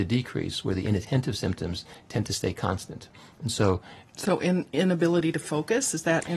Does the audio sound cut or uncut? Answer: uncut